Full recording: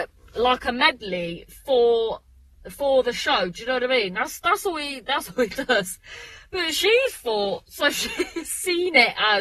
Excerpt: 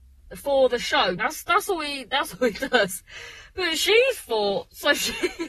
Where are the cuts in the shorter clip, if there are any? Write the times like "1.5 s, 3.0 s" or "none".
1.2 s